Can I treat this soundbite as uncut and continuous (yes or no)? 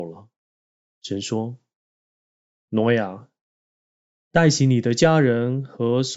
yes